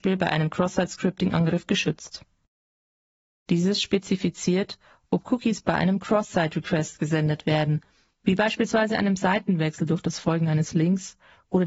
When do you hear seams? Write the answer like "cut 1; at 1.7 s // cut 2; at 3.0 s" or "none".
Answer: cut 1; at 3.5 s